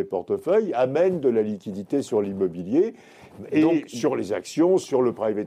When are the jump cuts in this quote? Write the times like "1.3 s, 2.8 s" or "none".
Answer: none